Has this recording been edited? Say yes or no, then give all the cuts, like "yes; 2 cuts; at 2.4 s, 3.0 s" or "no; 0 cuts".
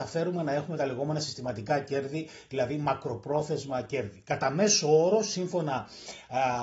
no; 0 cuts